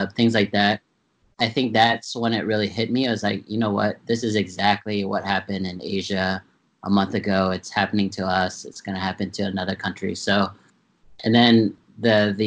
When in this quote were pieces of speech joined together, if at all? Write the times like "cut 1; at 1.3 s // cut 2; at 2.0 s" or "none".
none